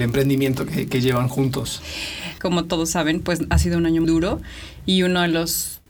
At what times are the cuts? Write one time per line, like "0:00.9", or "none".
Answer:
0:02.4
0:04.0